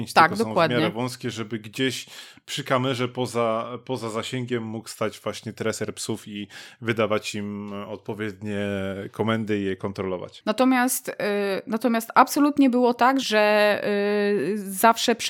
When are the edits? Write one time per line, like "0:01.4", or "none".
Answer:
0:10.4
0:13.2